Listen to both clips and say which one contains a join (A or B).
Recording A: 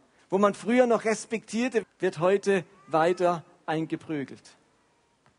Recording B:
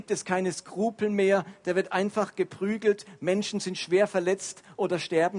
A